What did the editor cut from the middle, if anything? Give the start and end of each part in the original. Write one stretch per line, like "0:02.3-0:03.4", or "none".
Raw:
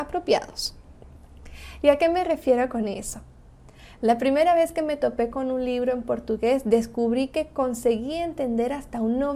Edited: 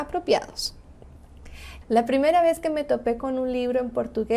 0:01.8-0:03.9